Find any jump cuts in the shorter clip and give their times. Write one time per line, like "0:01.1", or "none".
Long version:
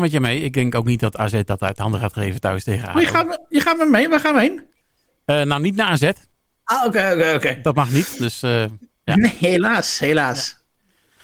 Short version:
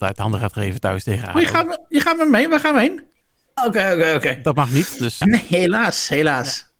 0:03.6
0:05.2